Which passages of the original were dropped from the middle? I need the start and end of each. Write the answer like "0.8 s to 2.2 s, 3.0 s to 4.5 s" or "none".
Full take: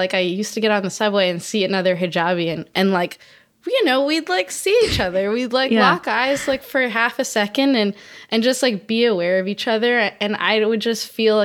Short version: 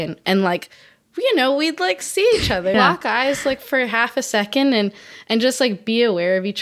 5.2 s to 5.8 s